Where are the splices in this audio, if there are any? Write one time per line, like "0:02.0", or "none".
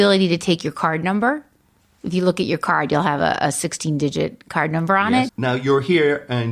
0:05.3